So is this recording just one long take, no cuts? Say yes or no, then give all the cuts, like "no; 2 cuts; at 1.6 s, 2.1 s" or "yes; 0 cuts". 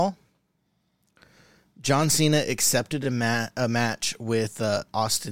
yes; 0 cuts